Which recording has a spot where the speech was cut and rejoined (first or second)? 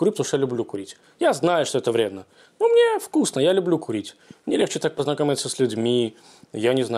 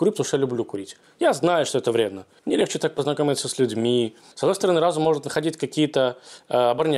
second